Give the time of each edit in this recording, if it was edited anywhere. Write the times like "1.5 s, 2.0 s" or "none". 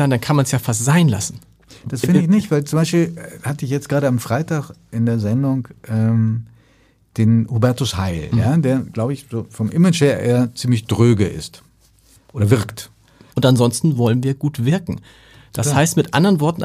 13.3 s